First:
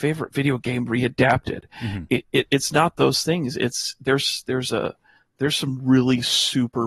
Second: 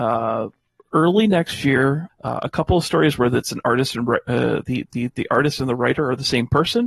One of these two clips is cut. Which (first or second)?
second